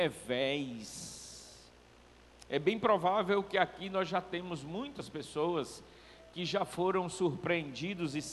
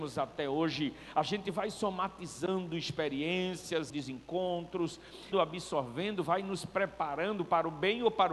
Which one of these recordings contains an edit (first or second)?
second